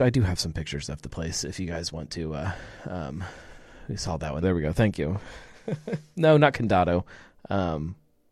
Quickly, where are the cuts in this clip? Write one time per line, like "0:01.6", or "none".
0:04.4